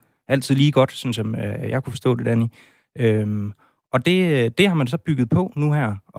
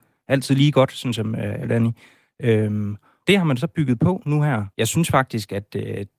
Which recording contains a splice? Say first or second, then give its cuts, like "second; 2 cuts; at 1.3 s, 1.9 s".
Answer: second; 3 cuts; at 1.6 s, 3.2 s, 4.7 s